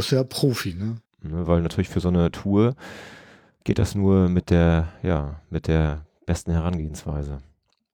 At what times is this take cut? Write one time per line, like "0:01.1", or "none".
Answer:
0:01.1